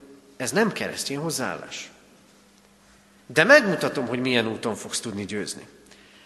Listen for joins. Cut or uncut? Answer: cut